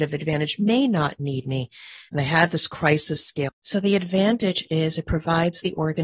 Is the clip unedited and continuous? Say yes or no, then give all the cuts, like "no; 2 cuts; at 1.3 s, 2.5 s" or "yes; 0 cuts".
no; 2 cuts; at 2.1 s, 3.5 s